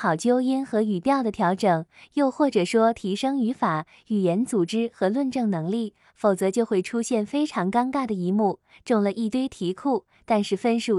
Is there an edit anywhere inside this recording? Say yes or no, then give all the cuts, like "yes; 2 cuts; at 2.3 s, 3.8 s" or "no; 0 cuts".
no; 0 cuts